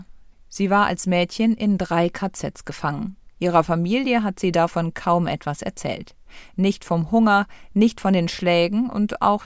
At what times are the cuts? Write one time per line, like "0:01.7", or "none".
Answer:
none

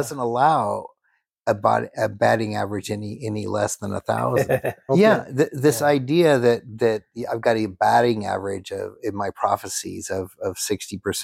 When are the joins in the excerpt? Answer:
0:04.9

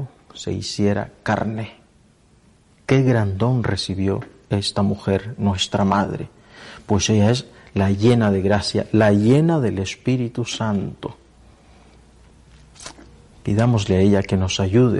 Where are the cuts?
none

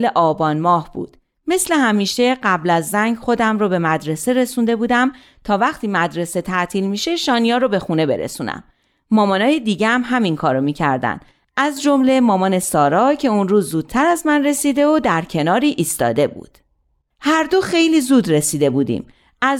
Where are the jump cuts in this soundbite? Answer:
none

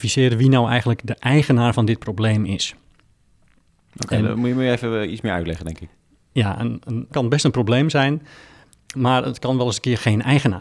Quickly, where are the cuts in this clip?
0:07.1

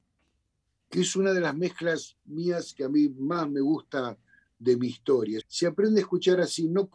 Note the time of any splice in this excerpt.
0:05.4

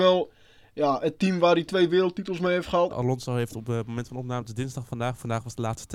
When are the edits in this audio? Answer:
0:02.9

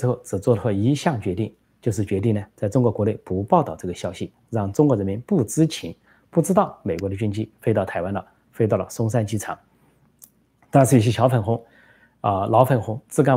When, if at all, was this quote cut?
none

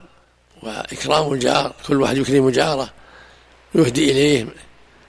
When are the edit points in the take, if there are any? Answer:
none

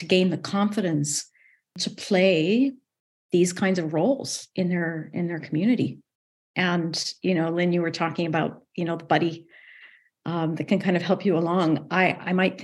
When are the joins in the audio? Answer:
none

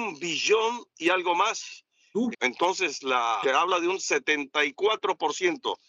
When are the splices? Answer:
0:02.3
0:03.4

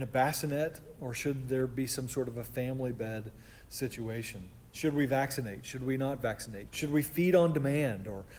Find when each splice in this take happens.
0:06.7

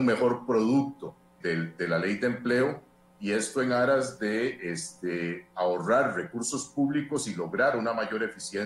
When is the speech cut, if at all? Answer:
0:01.4

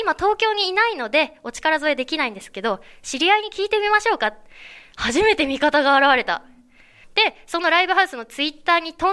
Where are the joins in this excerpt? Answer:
0:07.0

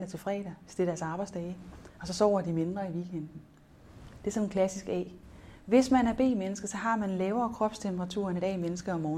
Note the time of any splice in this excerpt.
none

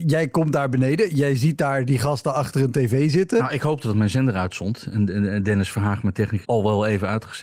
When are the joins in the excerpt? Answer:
0:06.4

